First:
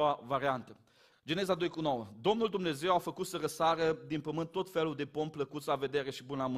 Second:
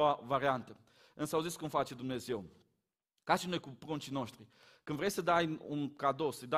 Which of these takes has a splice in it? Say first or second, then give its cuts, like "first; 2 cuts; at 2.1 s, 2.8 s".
first; 1 cut; at 1.1 s